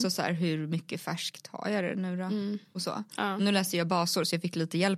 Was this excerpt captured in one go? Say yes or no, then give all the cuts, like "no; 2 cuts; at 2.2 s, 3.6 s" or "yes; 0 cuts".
yes; 0 cuts